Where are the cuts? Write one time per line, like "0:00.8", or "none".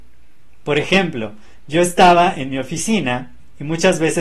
none